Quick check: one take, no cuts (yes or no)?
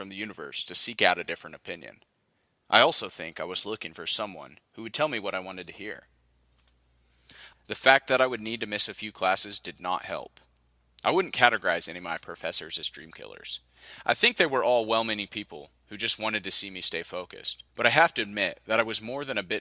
no